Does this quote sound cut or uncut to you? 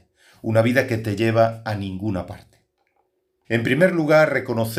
cut